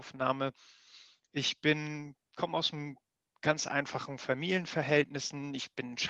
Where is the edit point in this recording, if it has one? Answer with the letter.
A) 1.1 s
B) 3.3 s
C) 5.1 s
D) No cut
D